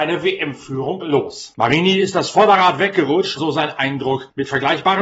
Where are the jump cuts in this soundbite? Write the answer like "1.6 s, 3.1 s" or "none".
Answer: 3.4 s